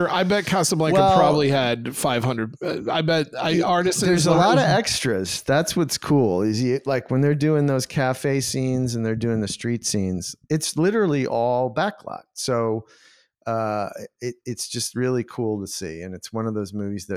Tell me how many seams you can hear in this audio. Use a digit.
0